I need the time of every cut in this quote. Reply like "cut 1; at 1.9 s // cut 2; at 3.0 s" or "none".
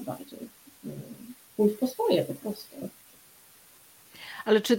none